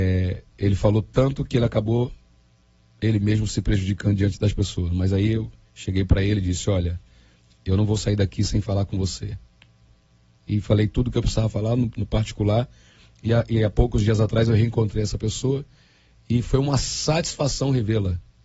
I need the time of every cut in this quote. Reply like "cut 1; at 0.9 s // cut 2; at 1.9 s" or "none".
cut 1; at 11.9 s